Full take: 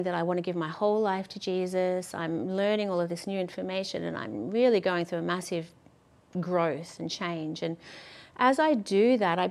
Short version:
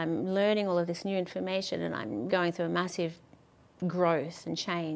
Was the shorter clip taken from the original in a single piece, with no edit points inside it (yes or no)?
no